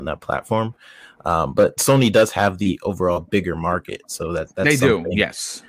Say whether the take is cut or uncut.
uncut